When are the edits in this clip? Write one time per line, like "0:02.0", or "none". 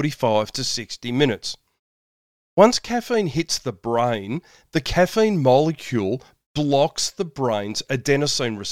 none